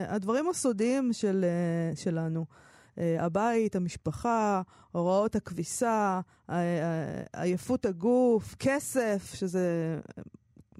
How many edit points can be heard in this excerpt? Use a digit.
0